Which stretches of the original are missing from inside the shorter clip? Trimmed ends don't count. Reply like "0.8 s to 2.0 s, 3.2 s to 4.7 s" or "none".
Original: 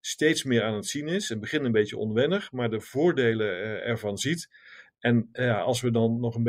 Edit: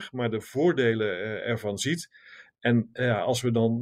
none